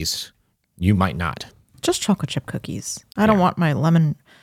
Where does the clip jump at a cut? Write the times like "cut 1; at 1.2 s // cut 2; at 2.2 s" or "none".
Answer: none